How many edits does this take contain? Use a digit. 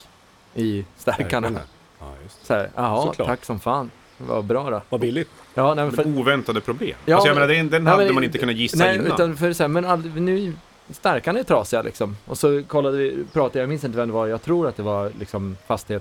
0